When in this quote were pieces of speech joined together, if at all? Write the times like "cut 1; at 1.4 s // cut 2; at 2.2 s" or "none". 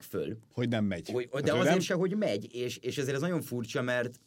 none